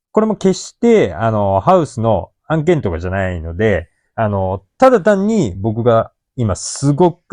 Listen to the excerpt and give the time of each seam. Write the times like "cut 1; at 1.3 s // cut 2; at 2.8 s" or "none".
none